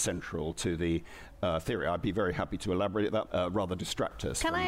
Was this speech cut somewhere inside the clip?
yes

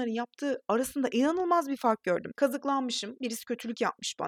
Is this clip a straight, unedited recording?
no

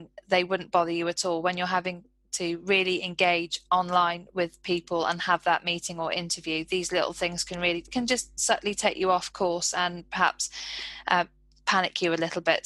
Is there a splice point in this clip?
no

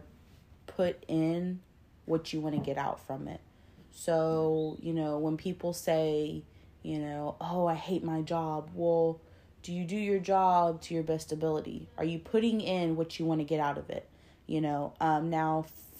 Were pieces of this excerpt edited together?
no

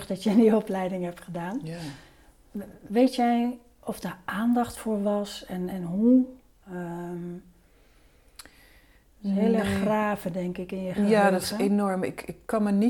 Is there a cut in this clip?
no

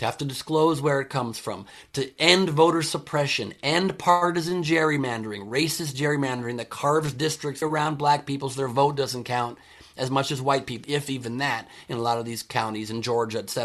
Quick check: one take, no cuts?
no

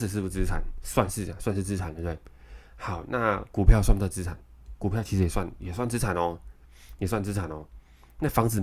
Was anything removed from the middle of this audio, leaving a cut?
no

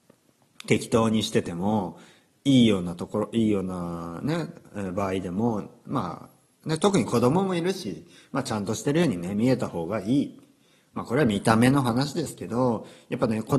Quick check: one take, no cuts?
yes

